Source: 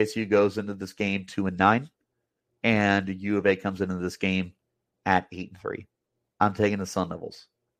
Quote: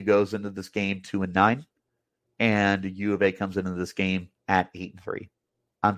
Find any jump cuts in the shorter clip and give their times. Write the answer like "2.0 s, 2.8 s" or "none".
4.4 s